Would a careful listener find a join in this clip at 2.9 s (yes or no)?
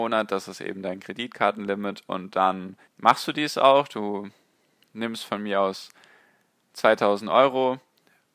yes